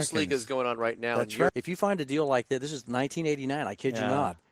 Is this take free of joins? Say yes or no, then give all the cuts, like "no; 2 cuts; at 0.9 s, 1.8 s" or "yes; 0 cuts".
no; 1 cut; at 1.5 s